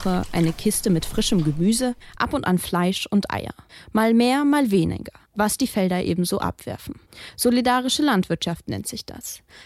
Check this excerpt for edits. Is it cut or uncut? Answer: uncut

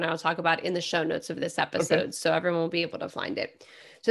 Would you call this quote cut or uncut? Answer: uncut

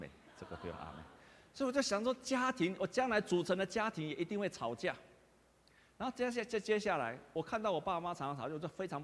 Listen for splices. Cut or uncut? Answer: uncut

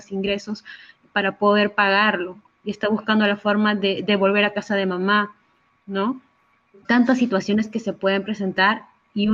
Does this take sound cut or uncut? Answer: uncut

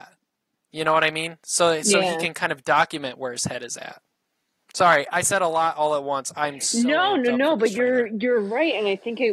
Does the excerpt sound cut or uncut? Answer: uncut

